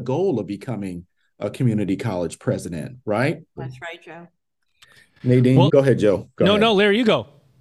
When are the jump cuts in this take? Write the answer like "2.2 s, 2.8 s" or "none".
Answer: 3.6 s, 5.7 s

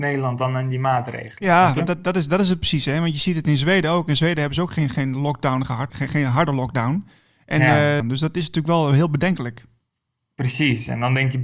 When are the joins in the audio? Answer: 5.9 s, 8.0 s

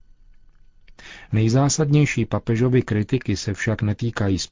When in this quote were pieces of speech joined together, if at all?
none

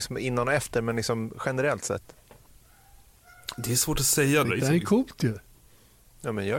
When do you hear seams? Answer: 4.4 s

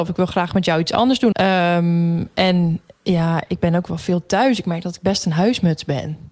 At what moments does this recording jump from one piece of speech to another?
1.3 s

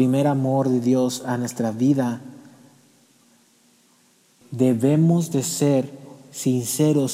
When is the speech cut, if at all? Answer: 4.4 s

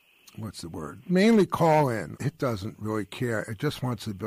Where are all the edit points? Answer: 1.0 s, 2.2 s

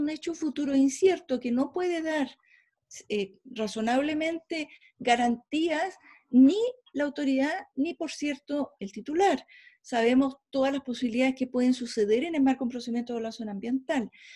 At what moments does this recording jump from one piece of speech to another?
none

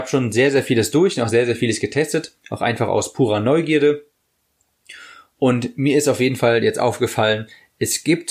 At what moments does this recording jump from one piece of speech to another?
none

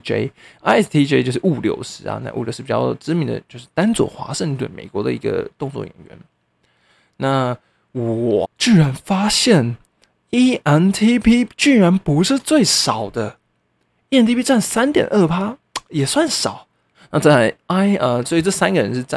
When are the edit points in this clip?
8.4 s, 16.9 s, 18.2 s

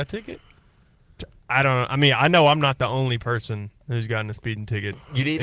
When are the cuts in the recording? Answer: none

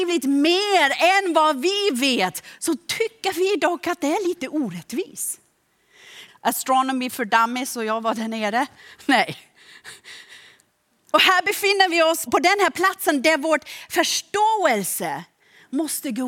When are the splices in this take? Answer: 6.3 s, 12.3 s

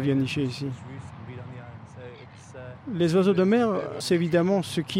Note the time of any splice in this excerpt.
4.0 s

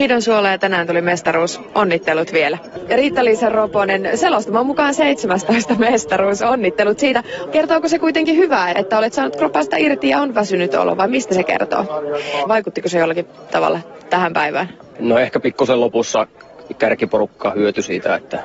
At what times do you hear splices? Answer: 7.5 s, 8.7 s, 12.5 s

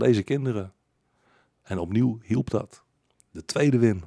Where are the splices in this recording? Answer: none

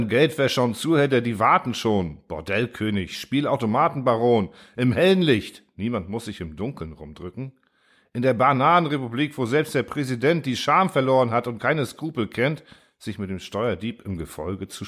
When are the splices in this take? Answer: none

